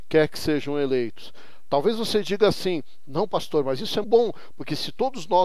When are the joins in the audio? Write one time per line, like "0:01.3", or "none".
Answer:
0:04.0